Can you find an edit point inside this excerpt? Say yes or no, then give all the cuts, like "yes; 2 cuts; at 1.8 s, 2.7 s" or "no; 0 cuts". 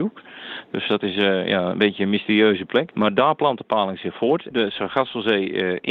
yes; 2 cuts; at 2.9 s, 4.5 s